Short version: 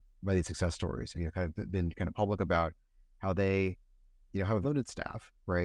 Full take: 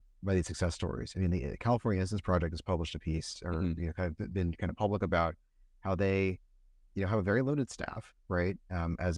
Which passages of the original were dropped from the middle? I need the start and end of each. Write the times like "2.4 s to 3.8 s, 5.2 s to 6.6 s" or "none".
1.1 s to 3.8 s, 7.2 s to 7.4 s